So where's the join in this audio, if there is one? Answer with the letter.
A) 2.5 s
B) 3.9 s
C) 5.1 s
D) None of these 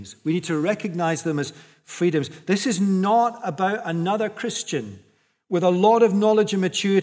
D